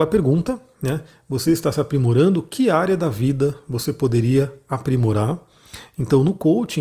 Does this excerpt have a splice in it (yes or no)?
no